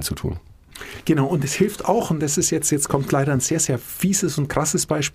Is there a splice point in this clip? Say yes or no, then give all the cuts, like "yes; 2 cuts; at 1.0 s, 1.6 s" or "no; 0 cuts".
no; 0 cuts